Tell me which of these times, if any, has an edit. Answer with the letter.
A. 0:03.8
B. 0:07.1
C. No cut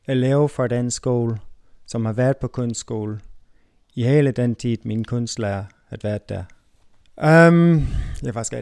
B